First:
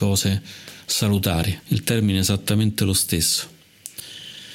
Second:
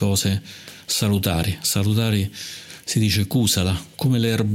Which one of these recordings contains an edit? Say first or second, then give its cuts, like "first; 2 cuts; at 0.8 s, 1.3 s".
first; 1 cut; at 1.6 s